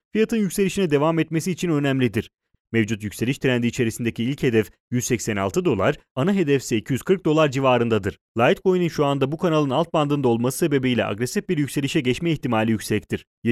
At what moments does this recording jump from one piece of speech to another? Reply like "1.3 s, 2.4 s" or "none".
2.5 s, 8.2 s